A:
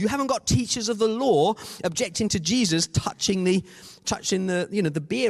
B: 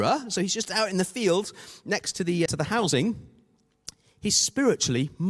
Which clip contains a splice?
B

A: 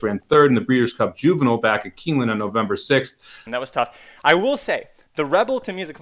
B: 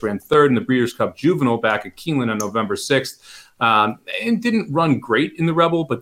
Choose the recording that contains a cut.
A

